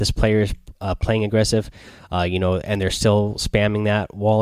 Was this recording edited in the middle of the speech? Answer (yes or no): no